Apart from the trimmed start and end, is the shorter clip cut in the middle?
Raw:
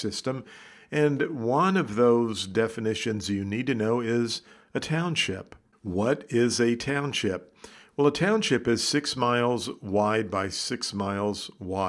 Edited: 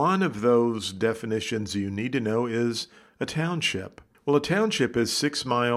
yes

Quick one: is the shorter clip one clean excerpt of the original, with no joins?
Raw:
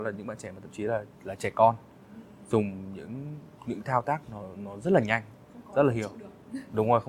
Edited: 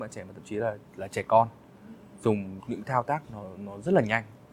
no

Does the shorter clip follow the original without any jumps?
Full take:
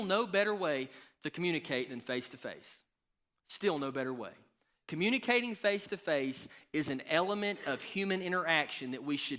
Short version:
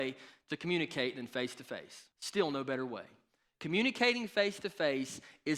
no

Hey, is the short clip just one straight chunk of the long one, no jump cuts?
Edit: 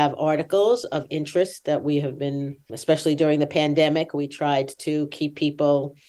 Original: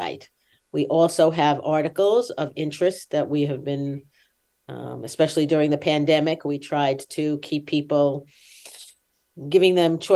no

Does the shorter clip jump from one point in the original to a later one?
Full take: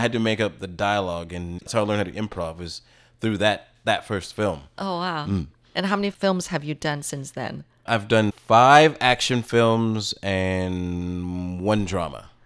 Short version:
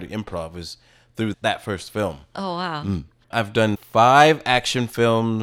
yes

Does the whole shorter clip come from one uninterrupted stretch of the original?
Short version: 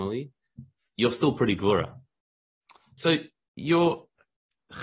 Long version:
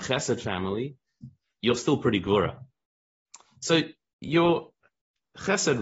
yes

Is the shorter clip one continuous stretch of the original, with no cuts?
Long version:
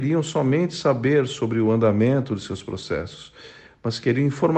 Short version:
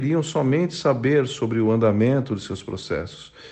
yes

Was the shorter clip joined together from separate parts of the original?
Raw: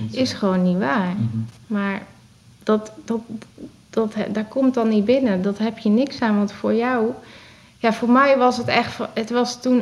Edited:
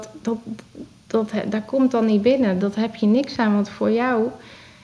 no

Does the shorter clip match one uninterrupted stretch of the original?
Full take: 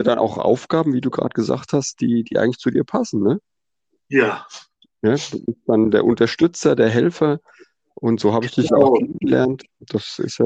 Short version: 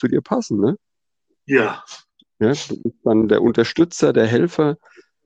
yes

